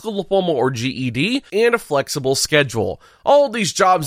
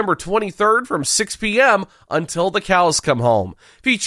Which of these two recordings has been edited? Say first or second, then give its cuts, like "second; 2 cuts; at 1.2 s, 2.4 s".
first; 1 cut; at 1.5 s